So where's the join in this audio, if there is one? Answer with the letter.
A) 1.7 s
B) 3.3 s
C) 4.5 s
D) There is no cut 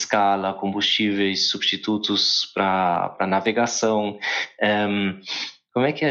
D